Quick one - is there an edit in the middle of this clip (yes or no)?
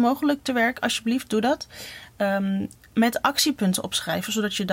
yes